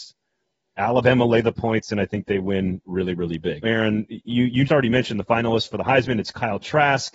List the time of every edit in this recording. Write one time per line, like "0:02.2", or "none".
0:03.6
0:04.7